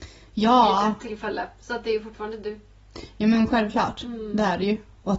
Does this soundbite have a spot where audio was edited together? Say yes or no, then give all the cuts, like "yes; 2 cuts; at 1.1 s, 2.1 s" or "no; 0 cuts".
no; 0 cuts